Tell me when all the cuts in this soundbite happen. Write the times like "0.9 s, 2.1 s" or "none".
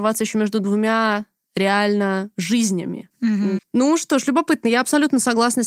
3.6 s